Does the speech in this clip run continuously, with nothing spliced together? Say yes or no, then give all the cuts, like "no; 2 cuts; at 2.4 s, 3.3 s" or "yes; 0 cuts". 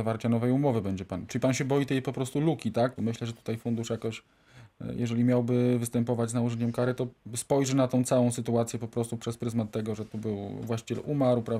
no; 1 cut; at 3.0 s